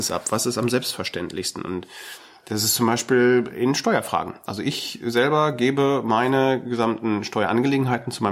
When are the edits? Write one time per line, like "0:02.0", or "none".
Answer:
none